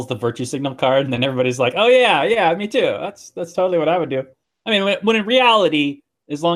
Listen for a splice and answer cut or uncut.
uncut